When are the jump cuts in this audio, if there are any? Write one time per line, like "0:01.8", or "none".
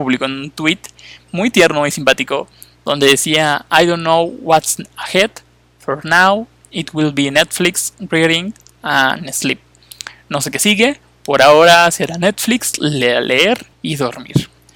0:13.7